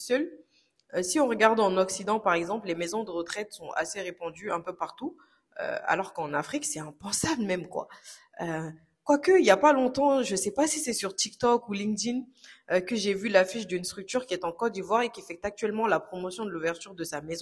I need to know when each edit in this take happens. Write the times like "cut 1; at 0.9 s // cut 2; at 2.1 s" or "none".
none